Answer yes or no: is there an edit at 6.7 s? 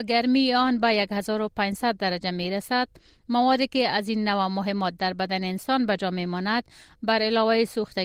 no